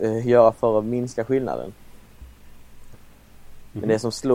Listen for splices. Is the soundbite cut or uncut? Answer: cut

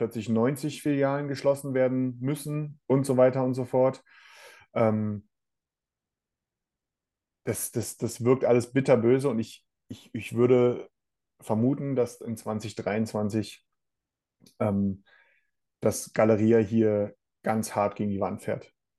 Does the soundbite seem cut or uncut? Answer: uncut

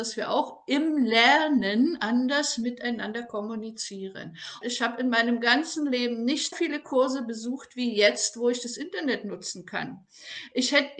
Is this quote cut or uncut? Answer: cut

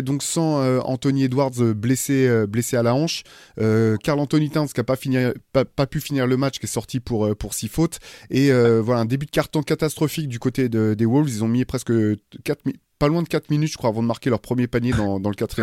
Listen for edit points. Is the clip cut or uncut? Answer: uncut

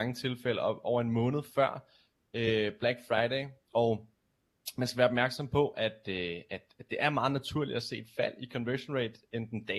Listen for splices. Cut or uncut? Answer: uncut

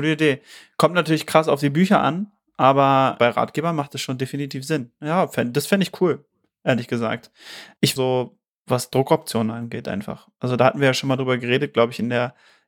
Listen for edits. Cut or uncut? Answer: cut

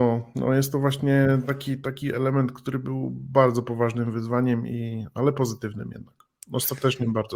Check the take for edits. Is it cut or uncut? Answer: uncut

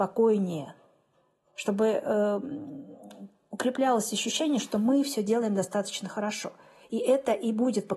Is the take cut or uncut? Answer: uncut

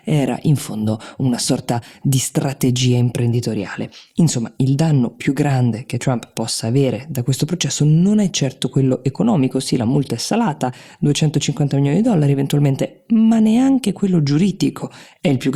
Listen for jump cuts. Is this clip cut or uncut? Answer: uncut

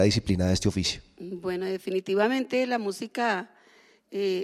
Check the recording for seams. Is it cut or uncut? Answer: uncut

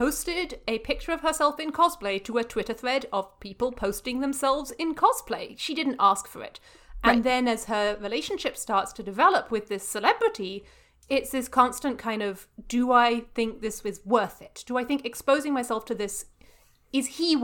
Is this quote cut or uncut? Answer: uncut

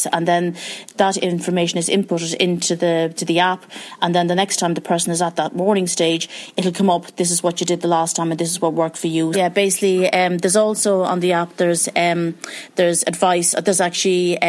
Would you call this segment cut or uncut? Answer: cut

